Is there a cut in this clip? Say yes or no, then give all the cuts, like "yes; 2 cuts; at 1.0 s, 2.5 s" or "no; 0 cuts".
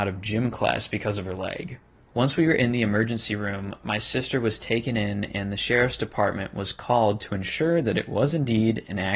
yes; 1 cut; at 2.1 s